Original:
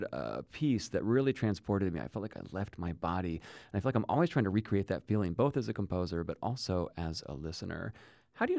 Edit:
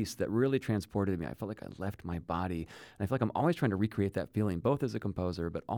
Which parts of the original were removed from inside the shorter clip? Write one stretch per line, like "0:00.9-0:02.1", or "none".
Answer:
none